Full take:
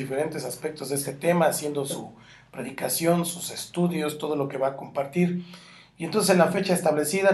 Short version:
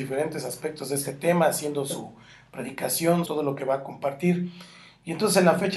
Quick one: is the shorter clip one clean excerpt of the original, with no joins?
no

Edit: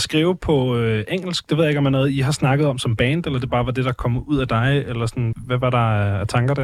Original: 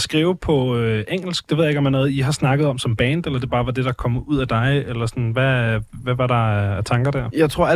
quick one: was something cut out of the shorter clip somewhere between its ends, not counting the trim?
yes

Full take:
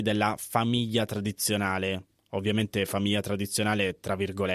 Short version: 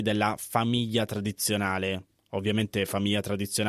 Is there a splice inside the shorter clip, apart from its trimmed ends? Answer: no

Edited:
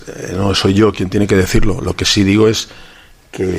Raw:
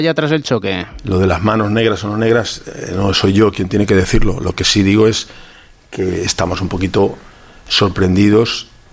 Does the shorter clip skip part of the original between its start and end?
no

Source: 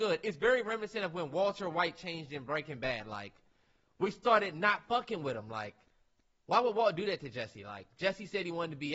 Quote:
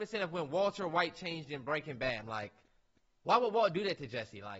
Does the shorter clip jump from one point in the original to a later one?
yes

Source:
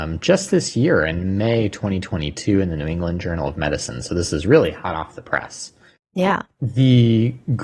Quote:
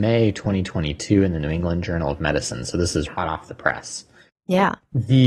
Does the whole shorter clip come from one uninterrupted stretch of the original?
no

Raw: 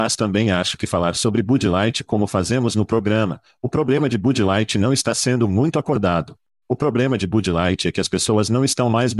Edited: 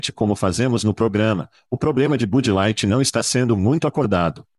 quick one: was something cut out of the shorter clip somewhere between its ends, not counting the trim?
no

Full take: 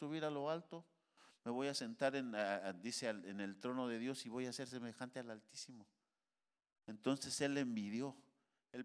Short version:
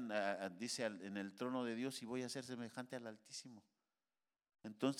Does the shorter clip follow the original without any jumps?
yes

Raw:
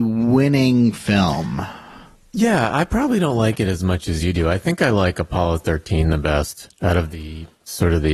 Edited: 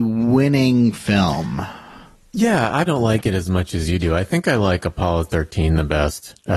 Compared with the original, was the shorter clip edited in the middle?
yes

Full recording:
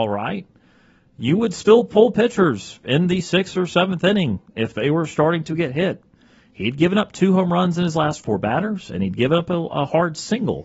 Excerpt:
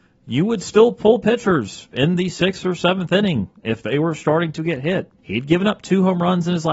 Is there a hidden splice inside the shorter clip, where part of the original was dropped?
yes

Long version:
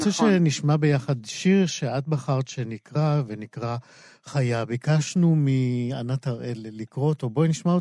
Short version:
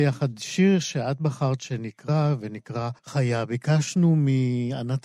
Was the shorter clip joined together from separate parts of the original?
yes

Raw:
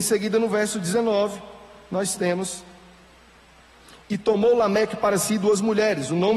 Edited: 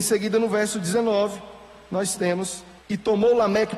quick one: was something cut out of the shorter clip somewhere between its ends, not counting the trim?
yes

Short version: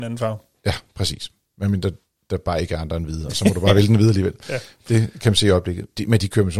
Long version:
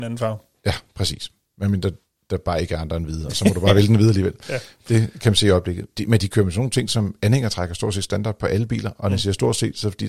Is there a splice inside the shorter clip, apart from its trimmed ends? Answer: no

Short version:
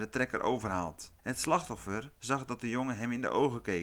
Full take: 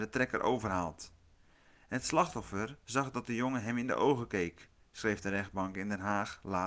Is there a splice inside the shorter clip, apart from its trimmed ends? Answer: yes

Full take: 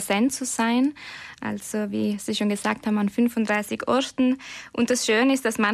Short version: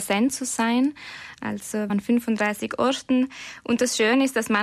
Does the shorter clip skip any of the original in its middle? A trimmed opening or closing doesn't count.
yes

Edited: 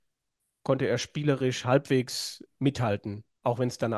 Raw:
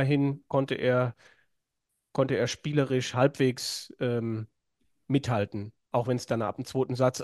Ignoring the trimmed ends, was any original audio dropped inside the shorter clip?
yes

